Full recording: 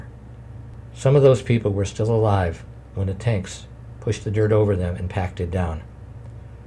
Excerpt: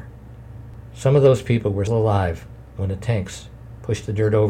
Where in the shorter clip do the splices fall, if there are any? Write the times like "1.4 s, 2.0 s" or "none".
1.9 s